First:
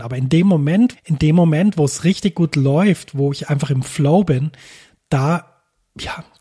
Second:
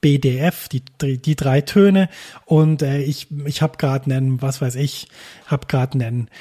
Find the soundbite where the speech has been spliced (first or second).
first